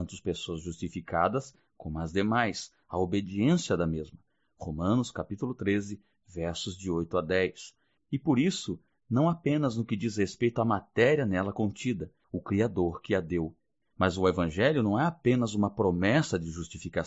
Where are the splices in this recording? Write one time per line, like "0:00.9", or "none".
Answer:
0:08.0
0:12.2
0:13.8